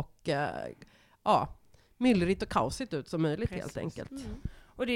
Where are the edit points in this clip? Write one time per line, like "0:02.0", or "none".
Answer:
none